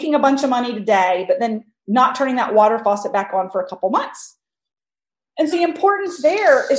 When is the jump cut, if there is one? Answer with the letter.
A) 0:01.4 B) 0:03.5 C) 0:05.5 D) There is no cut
C